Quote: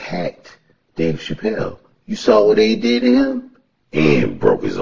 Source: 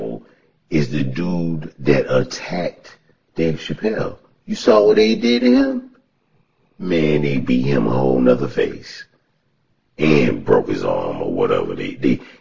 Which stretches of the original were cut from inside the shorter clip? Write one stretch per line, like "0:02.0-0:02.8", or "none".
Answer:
0:06.2-0:09.8